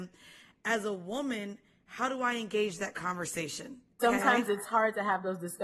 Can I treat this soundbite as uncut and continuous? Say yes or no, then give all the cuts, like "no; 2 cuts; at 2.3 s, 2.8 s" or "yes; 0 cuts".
no; 1 cut; at 4.0 s